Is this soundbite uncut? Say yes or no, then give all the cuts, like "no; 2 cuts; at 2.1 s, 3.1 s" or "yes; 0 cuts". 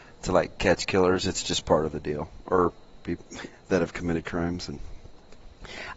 yes; 0 cuts